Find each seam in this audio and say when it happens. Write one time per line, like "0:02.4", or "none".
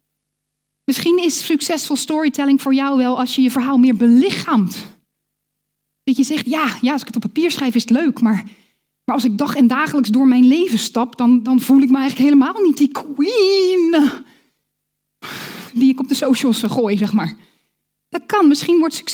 none